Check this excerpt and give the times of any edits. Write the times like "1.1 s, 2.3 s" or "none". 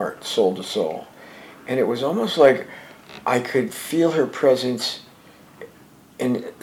none